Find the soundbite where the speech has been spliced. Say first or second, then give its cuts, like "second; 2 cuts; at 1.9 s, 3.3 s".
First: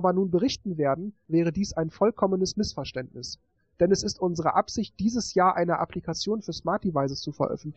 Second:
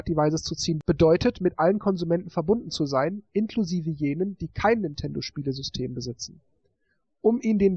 first; 1 cut; at 1.2 s